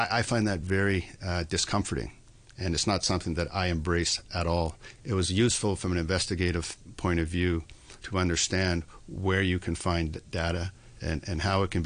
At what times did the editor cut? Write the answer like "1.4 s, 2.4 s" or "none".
5.0 s, 8.0 s